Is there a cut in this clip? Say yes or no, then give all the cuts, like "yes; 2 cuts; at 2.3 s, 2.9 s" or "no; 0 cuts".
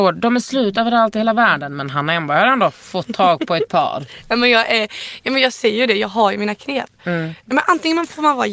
no; 0 cuts